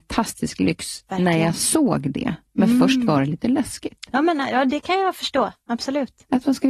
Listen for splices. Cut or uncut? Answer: uncut